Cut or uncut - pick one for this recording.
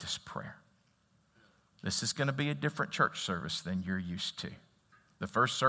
uncut